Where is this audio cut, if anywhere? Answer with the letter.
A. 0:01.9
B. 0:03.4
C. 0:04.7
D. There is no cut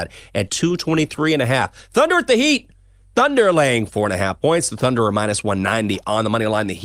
D